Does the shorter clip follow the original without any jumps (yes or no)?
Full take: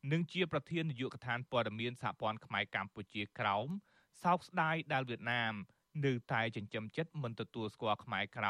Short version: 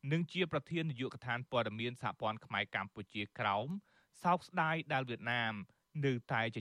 yes